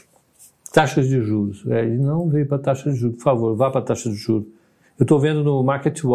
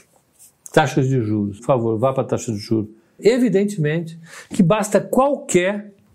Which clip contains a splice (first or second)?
second